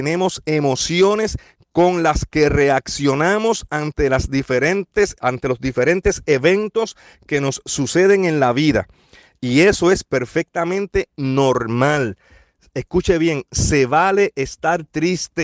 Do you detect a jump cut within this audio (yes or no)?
no